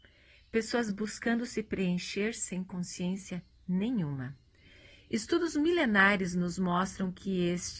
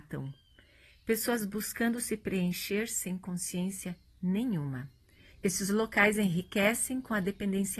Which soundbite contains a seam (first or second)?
second